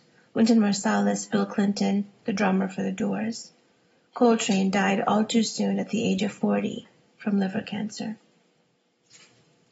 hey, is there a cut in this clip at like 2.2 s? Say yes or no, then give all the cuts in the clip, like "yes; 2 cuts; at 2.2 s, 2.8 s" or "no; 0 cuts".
yes; 1 cut; at 2.2 s